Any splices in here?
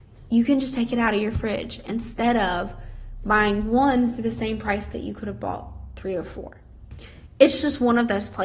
no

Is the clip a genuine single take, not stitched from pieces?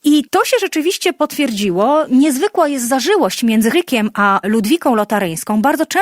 no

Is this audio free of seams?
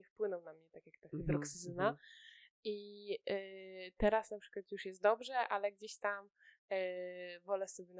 yes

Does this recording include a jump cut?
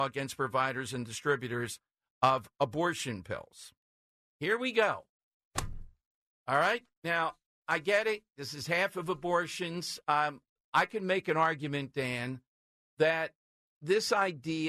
no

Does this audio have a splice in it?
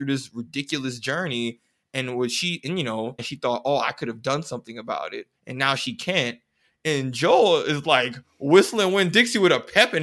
yes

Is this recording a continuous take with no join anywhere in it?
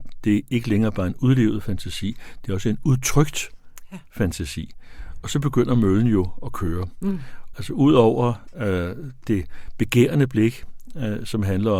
no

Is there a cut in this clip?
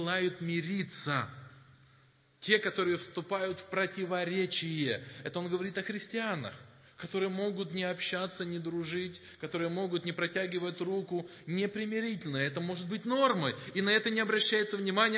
no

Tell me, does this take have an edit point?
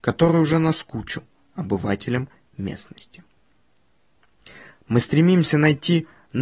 no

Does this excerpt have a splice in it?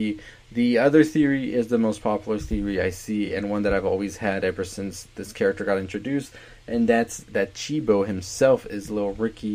no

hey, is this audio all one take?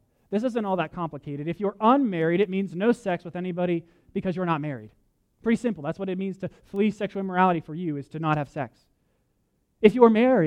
yes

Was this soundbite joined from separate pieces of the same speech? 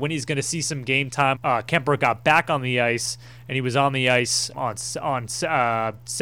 yes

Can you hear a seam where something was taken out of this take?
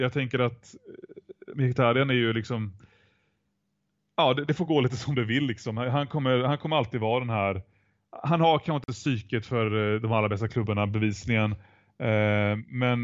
no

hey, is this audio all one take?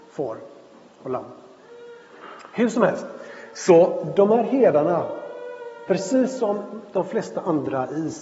yes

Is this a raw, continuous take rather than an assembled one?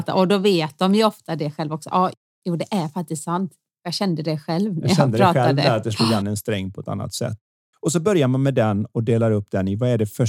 yes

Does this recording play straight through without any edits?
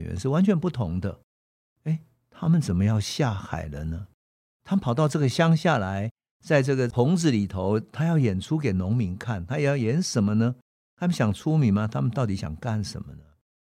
yes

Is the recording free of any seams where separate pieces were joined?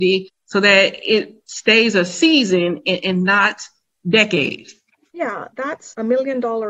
yes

